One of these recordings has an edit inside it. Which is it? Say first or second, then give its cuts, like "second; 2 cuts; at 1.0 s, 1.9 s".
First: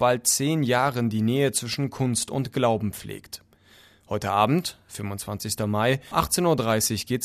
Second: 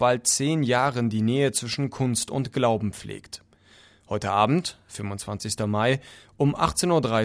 first; 1 cut; at 6.1 s